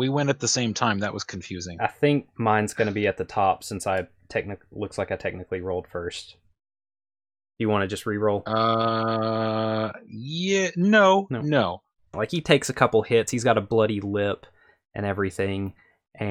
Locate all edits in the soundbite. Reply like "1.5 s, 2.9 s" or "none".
12.1 s